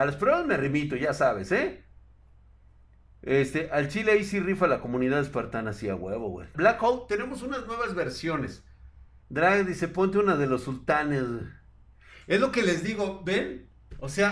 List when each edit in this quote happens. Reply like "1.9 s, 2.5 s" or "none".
6.5 s, 9.2 s